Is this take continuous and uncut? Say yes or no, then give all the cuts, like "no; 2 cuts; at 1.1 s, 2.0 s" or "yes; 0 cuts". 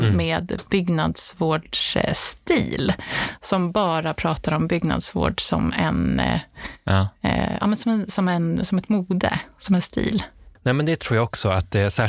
yes; 0 cuts